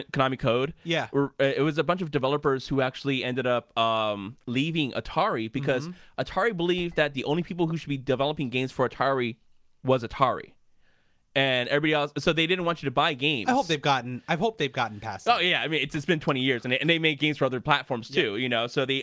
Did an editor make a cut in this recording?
no; 0 cuts

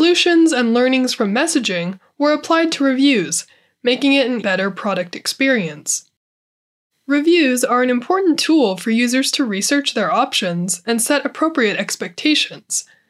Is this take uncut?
no; 1 cut; at 4.4 s

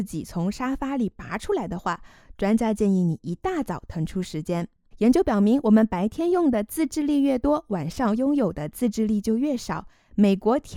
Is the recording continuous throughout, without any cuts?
no; 1 cut; at 4.9 s

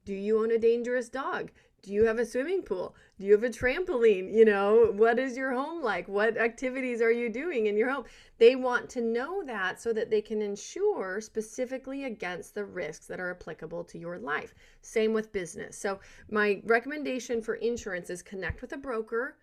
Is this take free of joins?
yes; 0 cuts

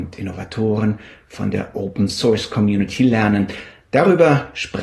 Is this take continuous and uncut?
yes; 0 cuts

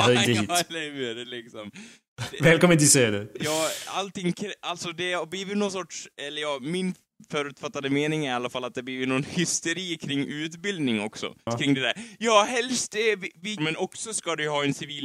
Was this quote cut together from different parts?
yes; 2 cuts; at 11.5 s, 13.6 s

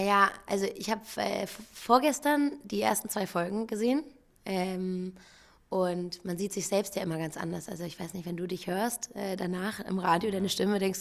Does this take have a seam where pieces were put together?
no; 0 cuts

